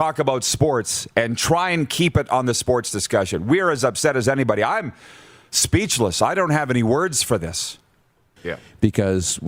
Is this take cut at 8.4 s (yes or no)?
yes